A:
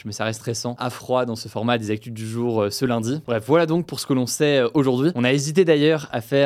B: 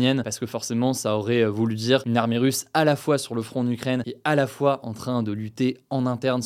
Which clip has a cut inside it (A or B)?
A